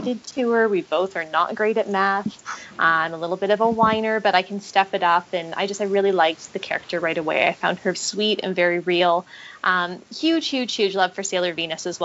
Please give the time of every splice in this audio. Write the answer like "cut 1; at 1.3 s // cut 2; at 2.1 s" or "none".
cut 1; at 7.9 s